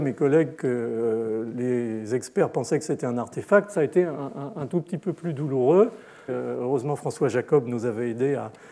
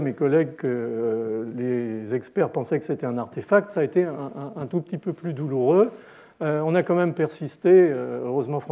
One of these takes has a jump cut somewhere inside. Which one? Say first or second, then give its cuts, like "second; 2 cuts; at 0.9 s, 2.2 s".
first; 1 cut; at 6.3 s